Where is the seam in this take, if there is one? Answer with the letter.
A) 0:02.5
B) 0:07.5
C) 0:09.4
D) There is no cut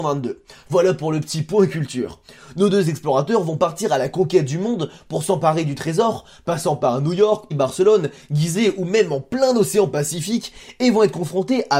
B